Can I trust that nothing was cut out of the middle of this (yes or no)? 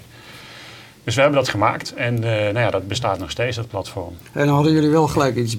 yes